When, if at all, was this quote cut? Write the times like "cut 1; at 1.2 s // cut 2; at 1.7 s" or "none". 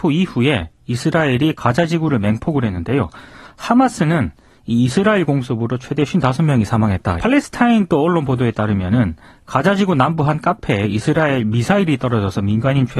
cut 1; at 7.2 s